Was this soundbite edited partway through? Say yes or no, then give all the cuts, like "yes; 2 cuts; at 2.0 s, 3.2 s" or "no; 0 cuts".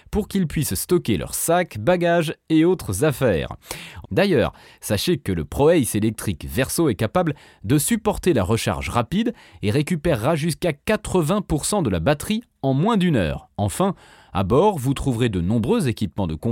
yes; 1 cut; at 4.0 s